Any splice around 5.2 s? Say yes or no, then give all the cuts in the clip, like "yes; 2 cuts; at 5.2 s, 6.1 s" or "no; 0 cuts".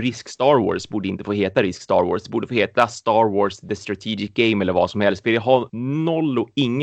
no; 0 cuts